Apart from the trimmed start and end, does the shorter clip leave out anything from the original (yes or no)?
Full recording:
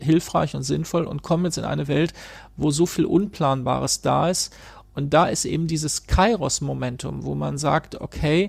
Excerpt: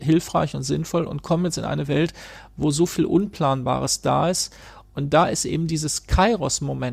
no